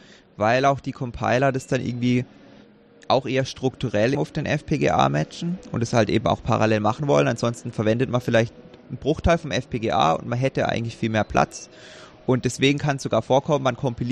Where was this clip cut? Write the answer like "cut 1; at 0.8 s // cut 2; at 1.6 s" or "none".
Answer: cut 1; at 4.1 s